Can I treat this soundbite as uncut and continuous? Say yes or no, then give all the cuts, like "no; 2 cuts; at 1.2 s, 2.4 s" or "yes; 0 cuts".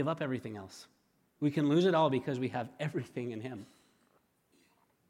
yes; 0 cuts